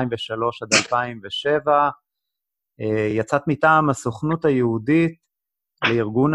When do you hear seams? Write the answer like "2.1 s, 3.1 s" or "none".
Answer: none